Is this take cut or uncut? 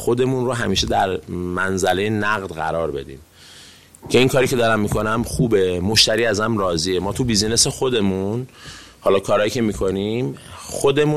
uncut